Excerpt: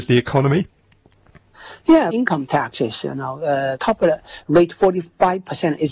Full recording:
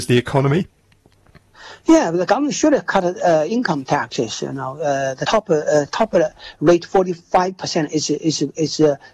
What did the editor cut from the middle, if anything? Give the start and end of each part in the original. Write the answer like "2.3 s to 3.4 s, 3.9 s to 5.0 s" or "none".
2.1 s to 3.5 s, 5.2 s to 5.9 s